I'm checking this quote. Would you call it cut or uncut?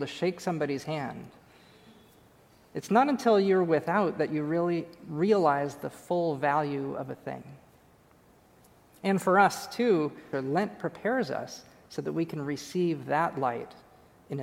cut